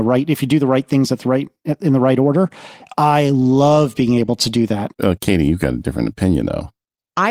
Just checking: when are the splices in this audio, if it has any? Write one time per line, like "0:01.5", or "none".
0:04.9

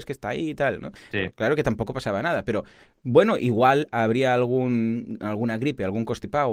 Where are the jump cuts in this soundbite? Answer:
0:01.1

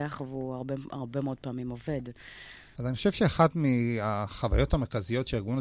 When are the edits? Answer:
0:02.8

